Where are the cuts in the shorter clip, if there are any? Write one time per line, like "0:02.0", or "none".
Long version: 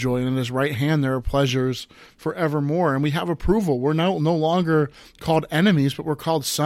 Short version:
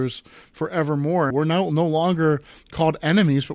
0:01.3